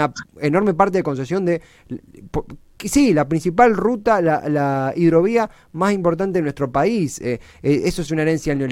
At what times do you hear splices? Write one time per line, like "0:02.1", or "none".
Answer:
none